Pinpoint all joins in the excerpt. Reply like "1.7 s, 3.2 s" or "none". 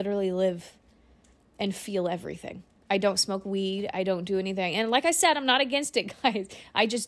none